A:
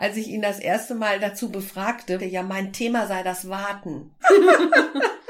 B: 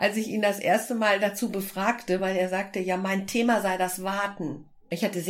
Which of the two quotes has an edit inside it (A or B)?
A